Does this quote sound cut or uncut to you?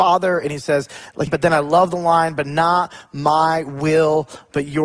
cut